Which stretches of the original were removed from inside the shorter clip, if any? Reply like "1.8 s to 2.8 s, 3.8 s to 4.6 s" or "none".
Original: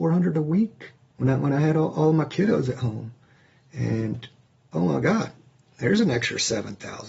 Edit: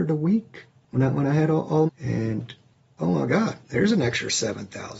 2.1 s to 3.6 s, 5.4 s to 5.7 s